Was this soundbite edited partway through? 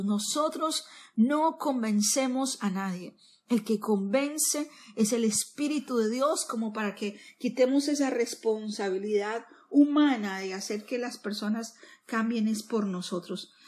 no; 0 cuts

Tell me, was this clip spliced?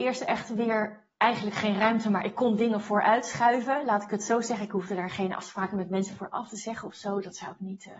no; 0 cuts

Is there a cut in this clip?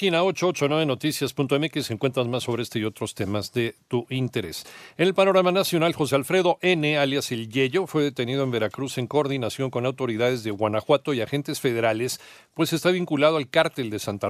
no; 0 cuts

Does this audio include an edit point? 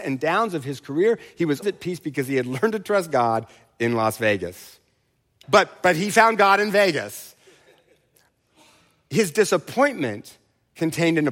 yes; 2 cuts; at 1.6 s, 5.4 s

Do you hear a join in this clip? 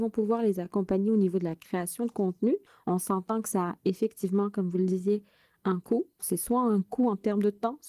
yes; 1 cut; at 6.2 s

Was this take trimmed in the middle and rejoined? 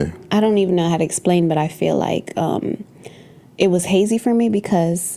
no; 0 cuts

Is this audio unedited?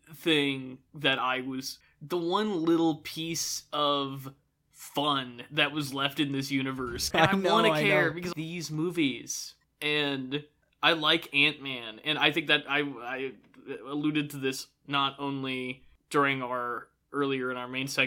no; 3 cuts; at 1.8 s, 7.1 s, 8.3 s

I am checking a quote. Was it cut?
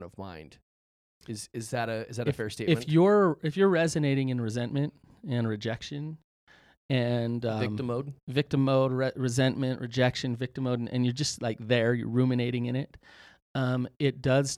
no; 0 cuts

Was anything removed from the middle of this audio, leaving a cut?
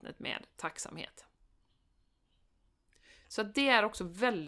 no; 0 cuts

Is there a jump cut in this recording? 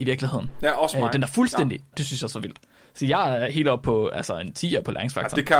yes; 1 cut; at 1.9 s

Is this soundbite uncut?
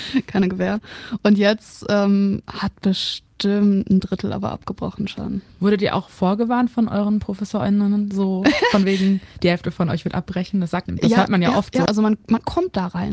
no; 2 cuts; at 10.9 s, 11.9 s

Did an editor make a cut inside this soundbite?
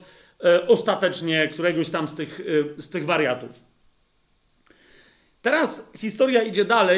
no; 0 cuts

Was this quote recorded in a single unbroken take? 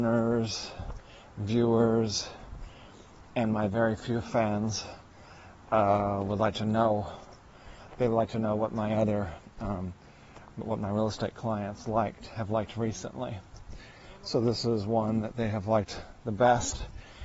yes; 0 cuts

